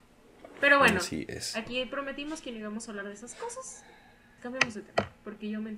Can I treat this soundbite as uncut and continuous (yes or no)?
no